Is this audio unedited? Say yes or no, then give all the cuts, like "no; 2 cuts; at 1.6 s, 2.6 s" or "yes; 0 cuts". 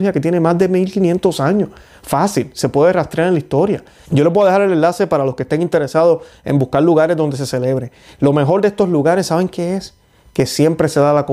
no; 1 cut; at 4.0 s